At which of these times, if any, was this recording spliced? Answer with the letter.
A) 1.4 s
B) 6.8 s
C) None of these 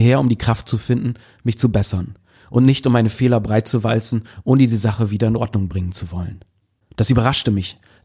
B